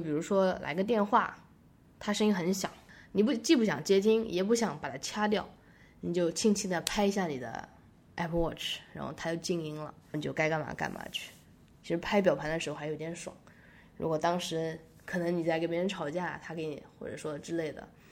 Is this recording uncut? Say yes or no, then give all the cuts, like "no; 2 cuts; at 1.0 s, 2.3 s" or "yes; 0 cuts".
yes; 0 cuts